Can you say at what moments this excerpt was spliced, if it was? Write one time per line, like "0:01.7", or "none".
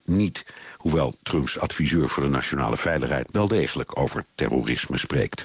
0:03.3